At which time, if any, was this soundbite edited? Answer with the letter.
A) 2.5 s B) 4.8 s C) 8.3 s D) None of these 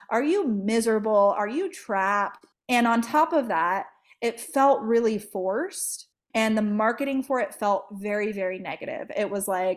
A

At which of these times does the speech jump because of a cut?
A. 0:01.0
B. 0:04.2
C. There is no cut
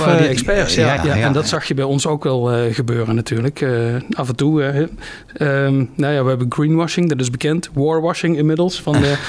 A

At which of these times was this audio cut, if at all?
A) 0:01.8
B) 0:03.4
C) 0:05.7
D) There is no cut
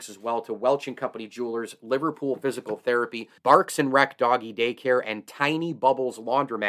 B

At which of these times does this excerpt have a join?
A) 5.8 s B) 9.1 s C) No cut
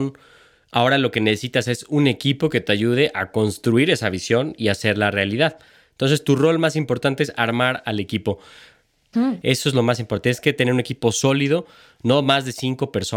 B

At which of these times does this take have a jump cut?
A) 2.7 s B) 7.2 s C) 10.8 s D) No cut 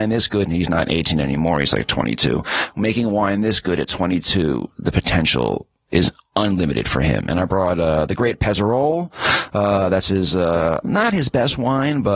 C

